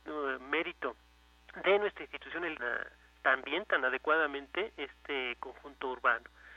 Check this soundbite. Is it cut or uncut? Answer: cut